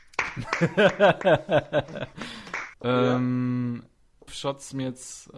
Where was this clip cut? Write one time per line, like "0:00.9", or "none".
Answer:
0:02.7
0:04.3